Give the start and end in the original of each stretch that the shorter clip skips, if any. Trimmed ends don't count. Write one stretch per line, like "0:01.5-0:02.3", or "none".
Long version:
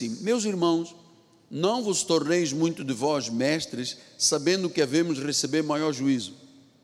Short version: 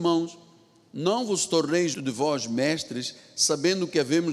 0:02.5-0:02.8